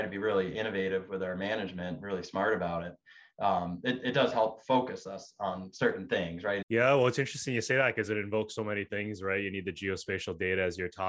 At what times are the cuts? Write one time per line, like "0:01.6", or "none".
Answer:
0:06.6